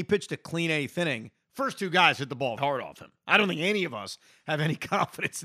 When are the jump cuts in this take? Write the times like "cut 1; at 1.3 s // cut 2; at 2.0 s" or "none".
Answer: cut 1; at 2.6 s